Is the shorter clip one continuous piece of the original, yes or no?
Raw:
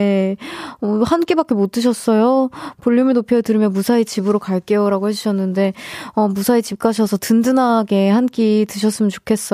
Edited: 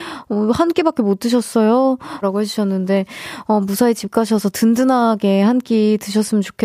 no